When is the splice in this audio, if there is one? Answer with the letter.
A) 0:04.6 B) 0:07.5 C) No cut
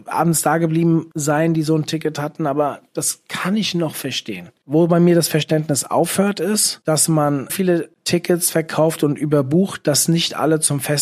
B